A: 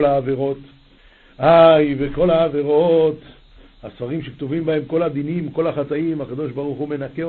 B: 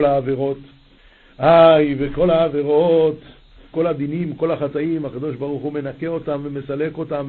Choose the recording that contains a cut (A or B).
B